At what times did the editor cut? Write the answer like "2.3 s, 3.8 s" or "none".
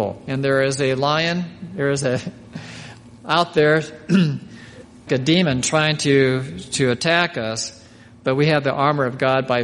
5.1 s

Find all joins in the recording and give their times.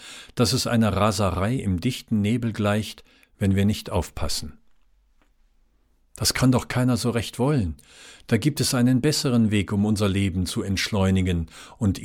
none

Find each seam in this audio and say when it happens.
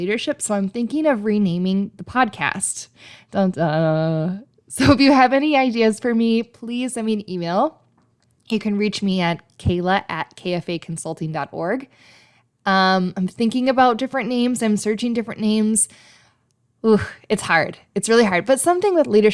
3.5 s

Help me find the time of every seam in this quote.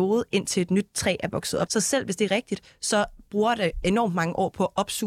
1.7 s

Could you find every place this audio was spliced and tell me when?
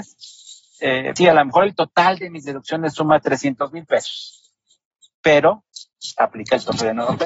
1.2 s

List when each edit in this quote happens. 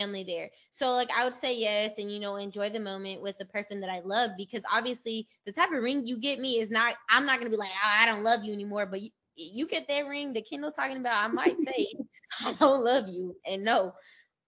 none

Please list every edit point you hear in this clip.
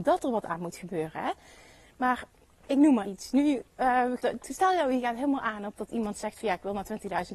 3.0 s, 4.2 s

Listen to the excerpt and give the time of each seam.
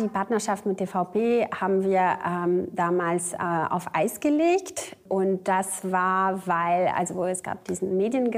none

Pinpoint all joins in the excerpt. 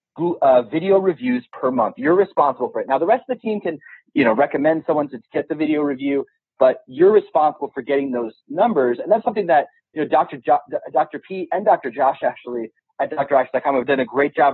none

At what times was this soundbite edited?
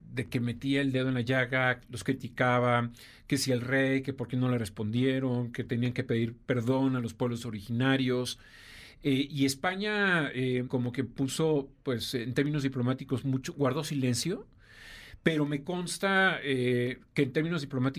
10.7 s

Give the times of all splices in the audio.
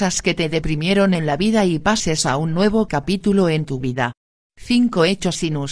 4.4 s

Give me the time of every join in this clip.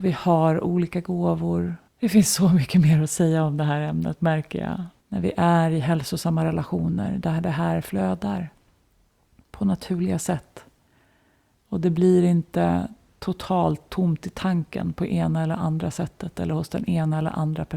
1.9 s, 5.0 s

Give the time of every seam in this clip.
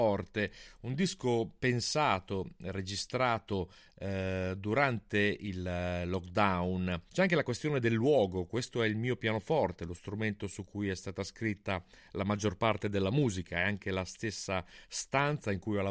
7.1 s

